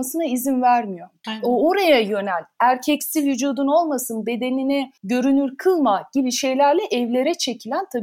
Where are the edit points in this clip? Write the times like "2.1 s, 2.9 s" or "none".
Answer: 1.2 s, 5.0 s